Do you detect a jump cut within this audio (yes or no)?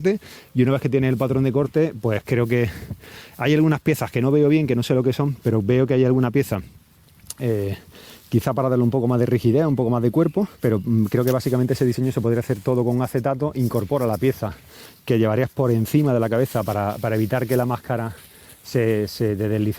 yes